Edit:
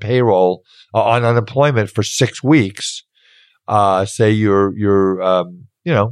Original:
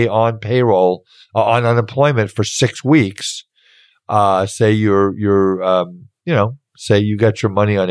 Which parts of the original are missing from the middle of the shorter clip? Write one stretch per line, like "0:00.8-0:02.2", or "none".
none